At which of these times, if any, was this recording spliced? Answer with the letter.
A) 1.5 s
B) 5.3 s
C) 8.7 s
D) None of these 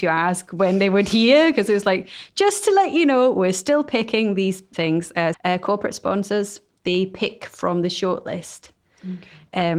B